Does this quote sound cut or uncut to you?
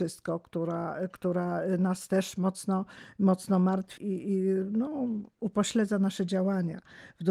cut